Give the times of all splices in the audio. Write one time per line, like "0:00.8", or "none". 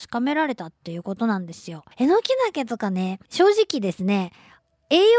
0:01.9
0:03.2